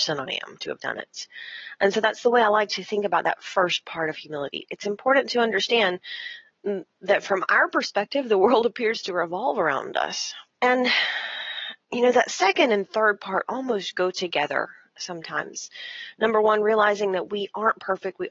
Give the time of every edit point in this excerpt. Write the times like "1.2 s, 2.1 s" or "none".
10.5 s, 11.8 s